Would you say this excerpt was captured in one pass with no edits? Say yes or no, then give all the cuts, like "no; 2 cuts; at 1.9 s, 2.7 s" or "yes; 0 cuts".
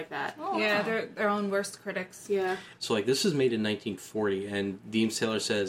no; 1 cut; at 2.8 s